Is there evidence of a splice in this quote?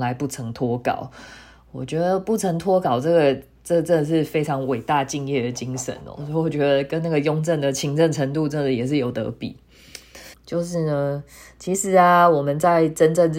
yes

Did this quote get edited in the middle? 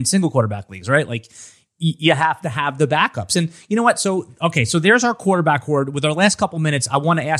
no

